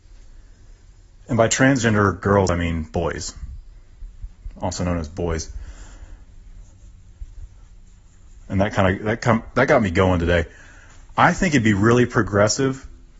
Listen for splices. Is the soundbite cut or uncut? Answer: uncut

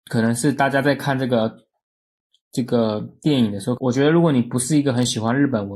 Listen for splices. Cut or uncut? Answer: cut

